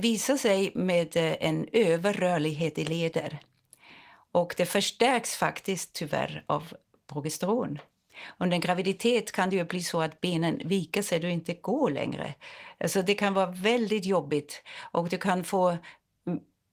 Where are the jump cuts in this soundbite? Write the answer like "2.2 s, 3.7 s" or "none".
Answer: none